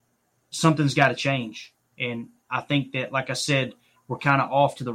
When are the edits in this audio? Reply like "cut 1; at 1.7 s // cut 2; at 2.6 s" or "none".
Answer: none